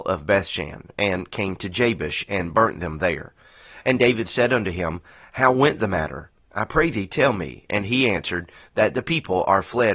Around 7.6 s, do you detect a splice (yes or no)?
no